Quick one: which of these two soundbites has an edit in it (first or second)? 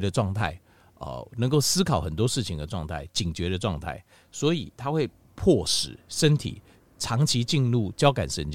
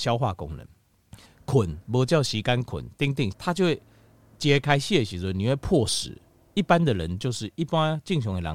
second